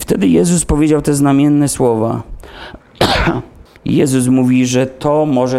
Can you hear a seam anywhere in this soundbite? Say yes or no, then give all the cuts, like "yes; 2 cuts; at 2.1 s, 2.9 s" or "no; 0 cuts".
yes; 1 cut; at 3.7 s